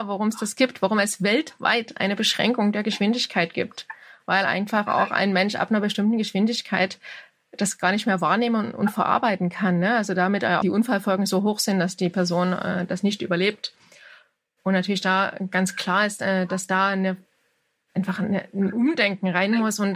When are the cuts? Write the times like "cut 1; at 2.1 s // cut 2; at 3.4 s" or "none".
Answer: cut 1; at 10.6 s